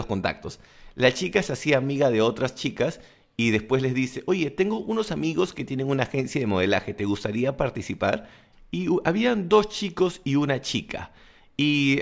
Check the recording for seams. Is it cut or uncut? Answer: cut